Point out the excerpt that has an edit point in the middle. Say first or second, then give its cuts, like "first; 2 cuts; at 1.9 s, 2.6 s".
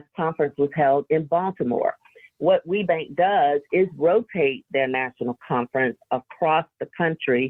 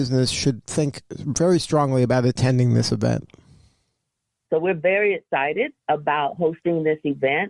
second; 2 cuts; at 4.5 s, 5.8 s